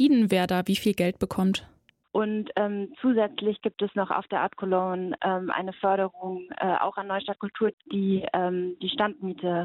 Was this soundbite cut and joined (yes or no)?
yes